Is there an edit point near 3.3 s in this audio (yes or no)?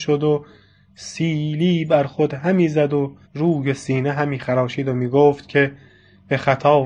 yes